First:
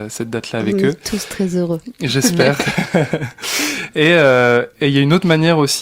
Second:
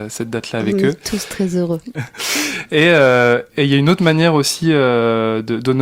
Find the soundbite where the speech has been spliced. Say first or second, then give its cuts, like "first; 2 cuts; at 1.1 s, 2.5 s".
second; 1 cut; at 1.9 s